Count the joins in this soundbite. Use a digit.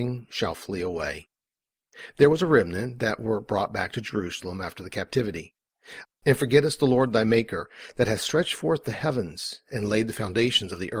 1